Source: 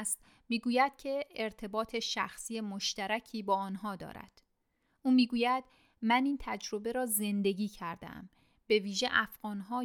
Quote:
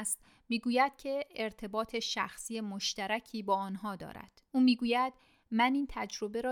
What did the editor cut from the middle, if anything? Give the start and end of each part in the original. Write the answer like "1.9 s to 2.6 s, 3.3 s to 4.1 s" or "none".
4.5 s to 5.0 s